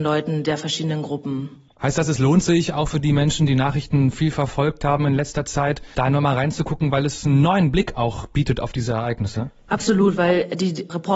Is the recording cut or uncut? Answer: uncut